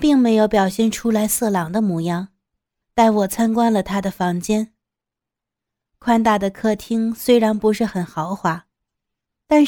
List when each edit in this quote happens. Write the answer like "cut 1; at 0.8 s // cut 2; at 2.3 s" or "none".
cut 1; at 2.8 s

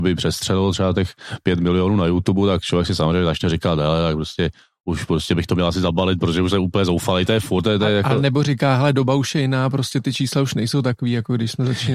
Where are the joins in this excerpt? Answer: none

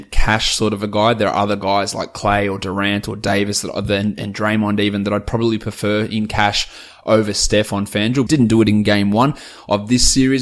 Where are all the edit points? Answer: cut 1; at 8.3 s

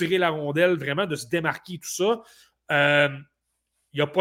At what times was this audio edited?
none

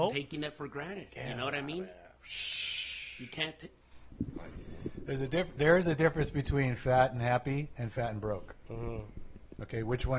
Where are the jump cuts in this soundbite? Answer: cut 1; at 2.1 s

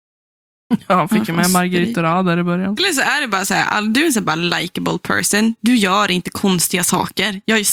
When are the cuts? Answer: cut 1; at 2.8 s

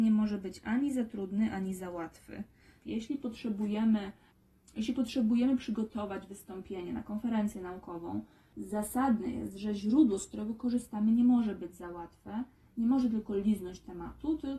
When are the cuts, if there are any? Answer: cut 1; at 2.8 s

